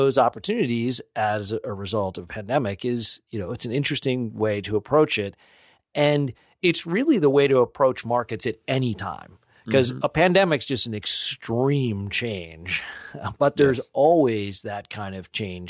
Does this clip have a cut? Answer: no; 0 cuts

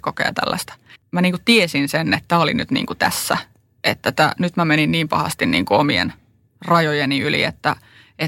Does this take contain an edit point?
yes; 1 cut; at 1.0 s

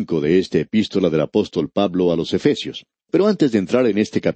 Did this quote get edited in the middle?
no; 0 cuts

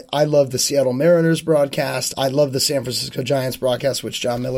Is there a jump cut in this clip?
yes; 1 cut; at 2.1 s

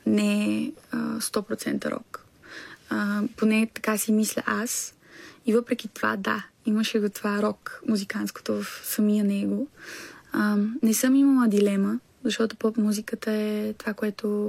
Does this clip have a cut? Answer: no; 0 cuts

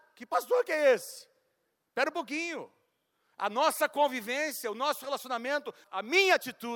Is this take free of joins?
yes; 0 cuts

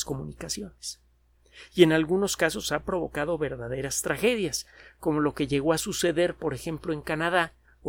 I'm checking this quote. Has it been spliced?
no; 0 cuts

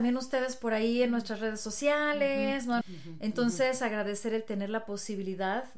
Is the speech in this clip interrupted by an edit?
yes; 1 cut; at 2.8 s

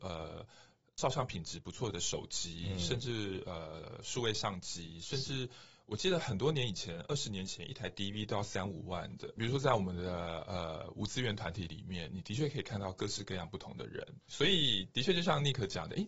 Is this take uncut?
no; 2 cuts; at 9.4 s, 14.3 s

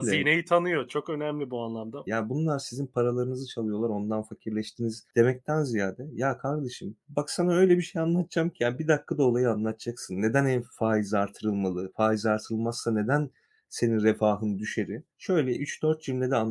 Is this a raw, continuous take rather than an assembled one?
no; 2 cuts; at 2.1 s, 15.1 s

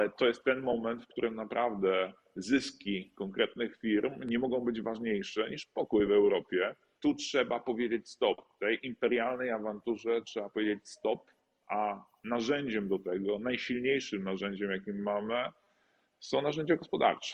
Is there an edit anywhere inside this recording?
yes; 1 cut; at 7.0 s

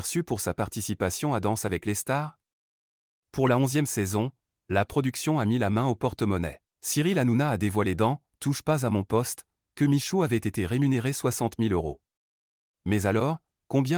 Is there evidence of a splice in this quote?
yes; 2 cuts; at 6.7 s, 12.7 s

